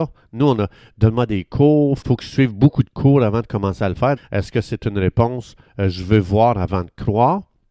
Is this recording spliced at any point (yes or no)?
yes